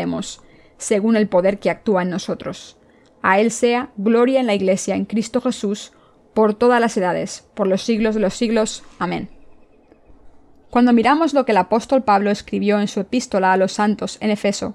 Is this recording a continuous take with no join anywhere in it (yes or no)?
yes